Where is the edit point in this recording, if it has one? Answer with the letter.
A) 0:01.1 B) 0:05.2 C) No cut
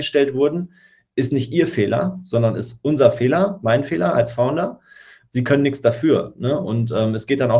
C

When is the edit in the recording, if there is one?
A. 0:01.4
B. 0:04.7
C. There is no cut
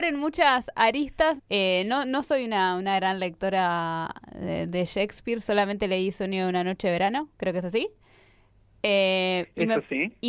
A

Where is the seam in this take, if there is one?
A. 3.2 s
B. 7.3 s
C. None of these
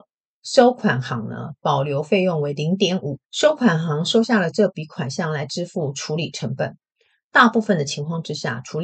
A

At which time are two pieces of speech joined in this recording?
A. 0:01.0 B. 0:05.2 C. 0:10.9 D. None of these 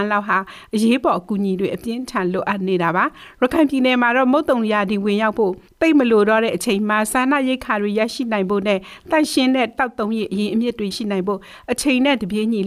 C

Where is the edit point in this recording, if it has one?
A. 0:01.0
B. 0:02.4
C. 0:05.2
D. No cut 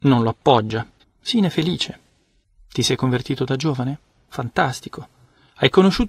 A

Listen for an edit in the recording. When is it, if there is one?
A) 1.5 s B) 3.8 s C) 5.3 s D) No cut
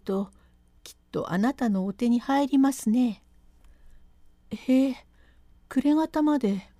D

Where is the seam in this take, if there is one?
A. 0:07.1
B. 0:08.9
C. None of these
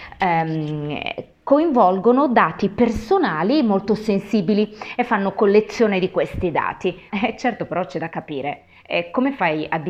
A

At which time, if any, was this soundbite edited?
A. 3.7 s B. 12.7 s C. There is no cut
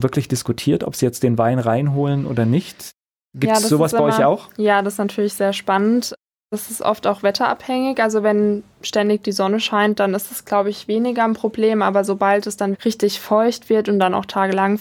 B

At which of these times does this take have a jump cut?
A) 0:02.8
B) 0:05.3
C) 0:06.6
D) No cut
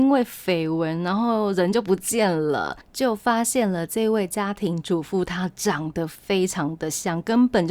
A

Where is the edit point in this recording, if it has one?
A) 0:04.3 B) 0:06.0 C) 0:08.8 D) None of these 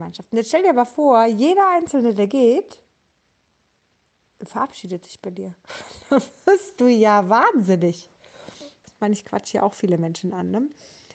C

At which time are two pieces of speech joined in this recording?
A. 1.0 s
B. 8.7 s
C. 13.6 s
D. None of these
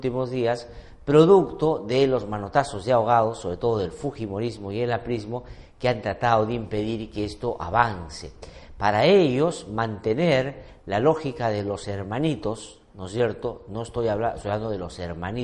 D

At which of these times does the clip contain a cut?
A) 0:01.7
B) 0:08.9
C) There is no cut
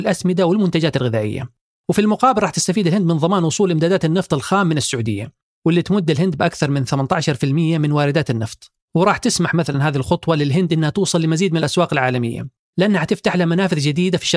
B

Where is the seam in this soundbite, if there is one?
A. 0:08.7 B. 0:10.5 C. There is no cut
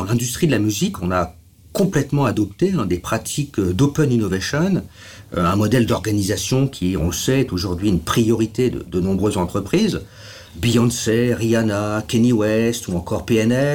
C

